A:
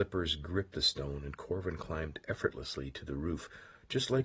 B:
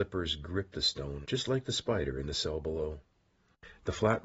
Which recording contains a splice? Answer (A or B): B